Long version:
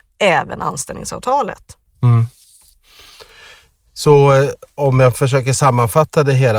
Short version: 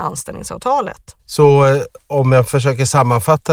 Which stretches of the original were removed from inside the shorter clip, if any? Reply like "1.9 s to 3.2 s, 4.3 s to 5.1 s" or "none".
1.8 s to 3.9 s